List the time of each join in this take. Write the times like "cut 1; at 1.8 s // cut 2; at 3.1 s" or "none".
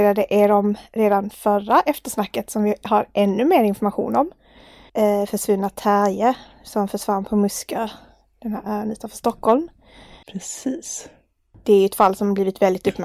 cut 1; at 4.9 s // cut 2; at 10.2 s